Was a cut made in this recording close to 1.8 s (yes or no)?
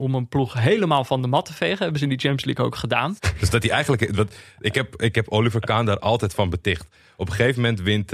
no